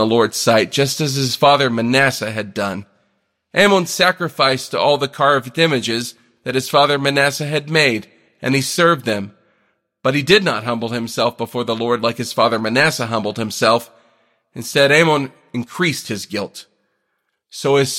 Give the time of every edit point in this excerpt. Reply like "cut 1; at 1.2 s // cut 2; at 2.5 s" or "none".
none